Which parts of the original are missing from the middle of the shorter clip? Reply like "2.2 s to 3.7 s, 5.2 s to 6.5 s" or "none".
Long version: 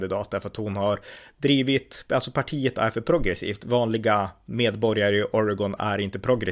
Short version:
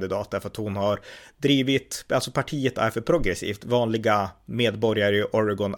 none